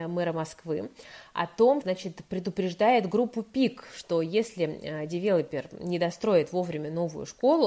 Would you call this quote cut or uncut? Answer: cut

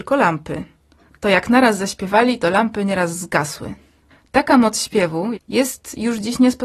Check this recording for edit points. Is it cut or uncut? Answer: cut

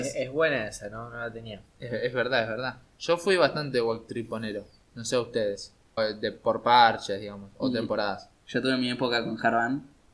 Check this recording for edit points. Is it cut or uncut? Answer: cut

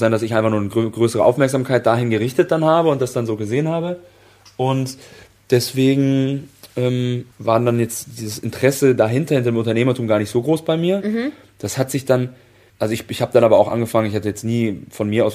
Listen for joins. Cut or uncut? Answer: cut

